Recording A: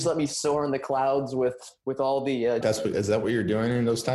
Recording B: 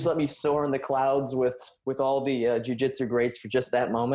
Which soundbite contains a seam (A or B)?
A